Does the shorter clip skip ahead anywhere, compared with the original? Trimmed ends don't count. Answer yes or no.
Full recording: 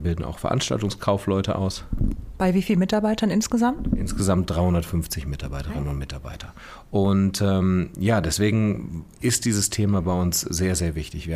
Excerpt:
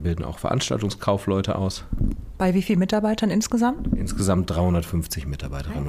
no